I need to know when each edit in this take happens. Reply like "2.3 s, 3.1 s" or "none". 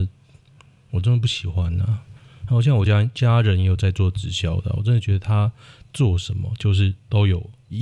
none